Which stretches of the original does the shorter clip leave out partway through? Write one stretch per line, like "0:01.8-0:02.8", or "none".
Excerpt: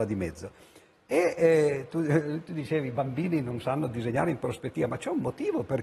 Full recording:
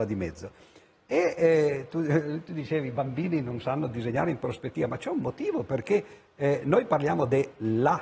none